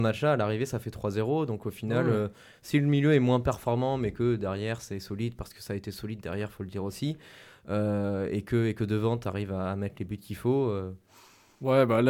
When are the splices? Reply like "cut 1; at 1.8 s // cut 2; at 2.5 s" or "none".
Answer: none